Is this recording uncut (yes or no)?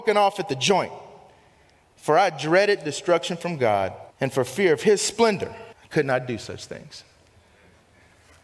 no